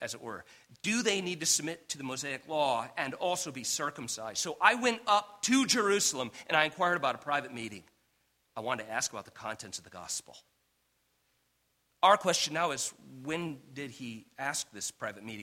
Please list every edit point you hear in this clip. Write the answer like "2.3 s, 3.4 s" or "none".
none